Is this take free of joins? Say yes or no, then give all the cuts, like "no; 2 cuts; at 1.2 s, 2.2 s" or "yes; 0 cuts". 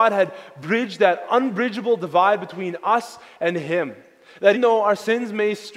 no; 1 cut; at 4.5 s